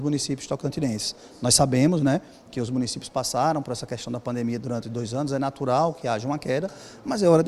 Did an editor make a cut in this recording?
no; 0 cuts

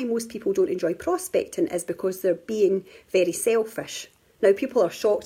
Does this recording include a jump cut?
no; 0 cuts

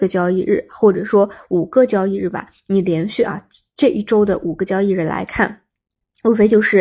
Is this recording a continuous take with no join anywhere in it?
yes; 0 cuts

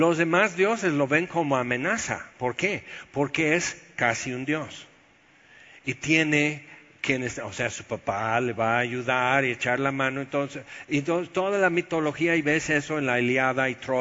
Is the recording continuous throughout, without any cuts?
yes; 0 cuts

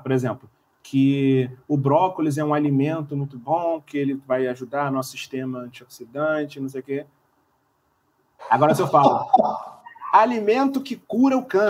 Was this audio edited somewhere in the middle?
yes; 1 cut; at 8.4 s

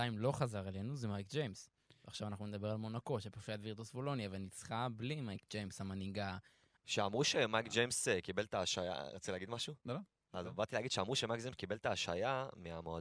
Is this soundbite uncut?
no; 1 cut; at 6.8 s

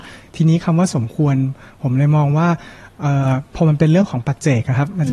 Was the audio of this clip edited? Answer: no; 0 cuts

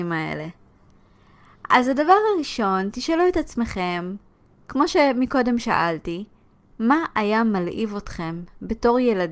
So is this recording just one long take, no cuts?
yes; 0 cuts

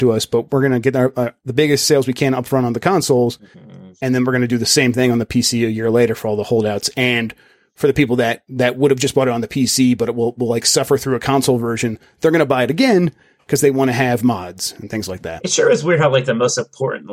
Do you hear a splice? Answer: no; 0 cuts

